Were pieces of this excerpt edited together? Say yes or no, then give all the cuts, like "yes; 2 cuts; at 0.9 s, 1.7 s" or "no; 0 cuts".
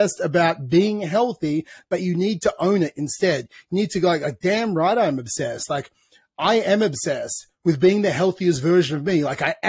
yes; 1 cut; at 1.8 s